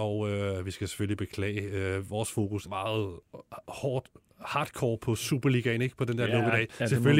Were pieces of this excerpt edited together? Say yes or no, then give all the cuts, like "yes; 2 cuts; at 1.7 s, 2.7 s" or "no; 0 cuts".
yes; 1 cut; at 2.6 s